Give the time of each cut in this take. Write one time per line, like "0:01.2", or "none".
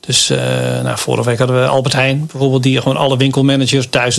none